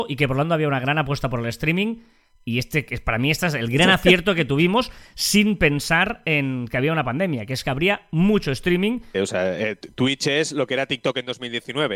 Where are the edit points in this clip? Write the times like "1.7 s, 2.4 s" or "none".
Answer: 9.1 s